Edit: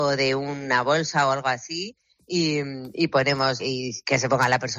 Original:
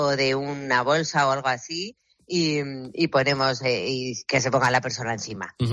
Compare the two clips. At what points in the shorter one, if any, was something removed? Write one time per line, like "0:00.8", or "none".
0:03.6